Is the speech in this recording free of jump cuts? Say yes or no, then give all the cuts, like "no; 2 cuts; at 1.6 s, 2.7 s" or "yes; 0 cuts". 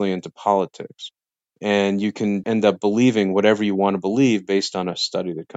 no; 1 cut; at 2.4 s